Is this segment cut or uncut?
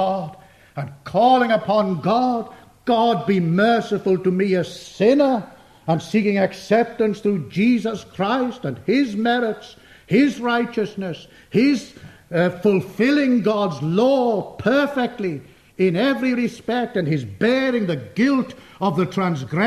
uncut